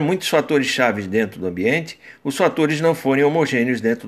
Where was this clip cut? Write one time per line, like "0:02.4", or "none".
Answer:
none